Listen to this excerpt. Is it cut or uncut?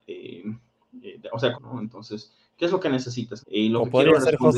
cut